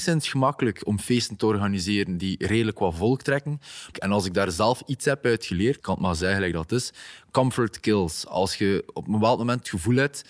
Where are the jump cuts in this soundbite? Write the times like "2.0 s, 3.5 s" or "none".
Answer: 3.9 s, 5.8 s